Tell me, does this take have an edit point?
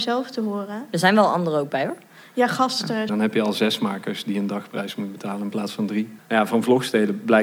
yes; 2 cuts; at 3.1 s, 6.2 s

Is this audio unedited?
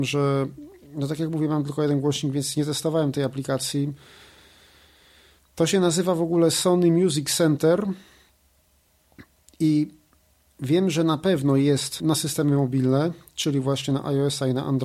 yes; 0 cuts

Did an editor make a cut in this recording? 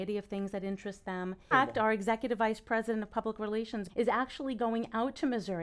yes; 2 cuts; at 1.5 s, 3.9 s

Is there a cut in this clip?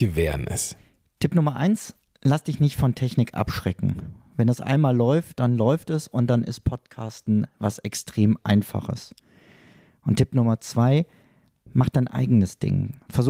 no; 0 cuts

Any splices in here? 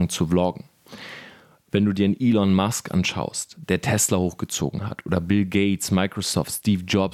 no; 0 cuts

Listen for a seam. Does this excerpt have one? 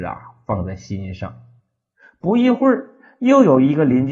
no; 0 cuts

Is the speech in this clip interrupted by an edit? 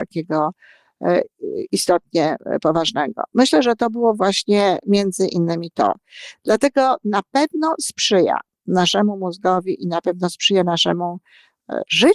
no; 0 cuts

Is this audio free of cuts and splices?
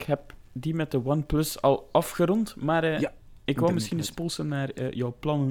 yes; 0 cuts

